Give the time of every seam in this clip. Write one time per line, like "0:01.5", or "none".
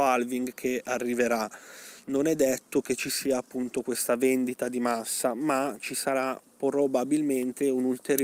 none